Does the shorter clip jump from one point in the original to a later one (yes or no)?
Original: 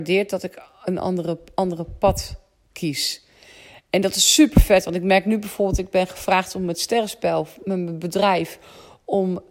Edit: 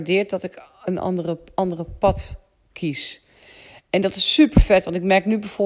no